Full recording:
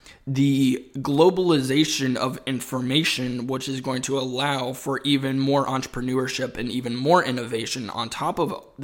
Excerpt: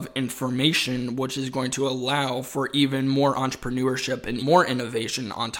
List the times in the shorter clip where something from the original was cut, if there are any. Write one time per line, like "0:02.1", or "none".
0:04.4